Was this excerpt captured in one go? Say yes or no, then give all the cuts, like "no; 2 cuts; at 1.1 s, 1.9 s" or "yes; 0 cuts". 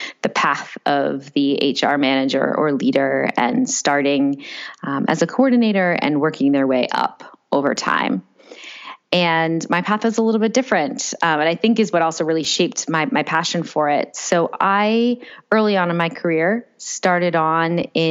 yes; 0 cuts